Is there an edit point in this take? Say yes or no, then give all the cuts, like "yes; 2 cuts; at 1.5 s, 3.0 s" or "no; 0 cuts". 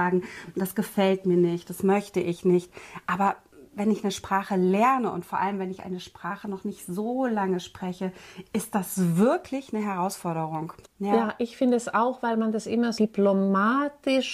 yes; 2 cuts; at 10.8 s, 13.0 s